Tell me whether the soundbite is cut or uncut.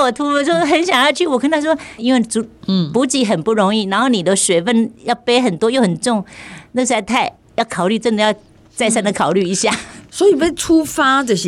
cut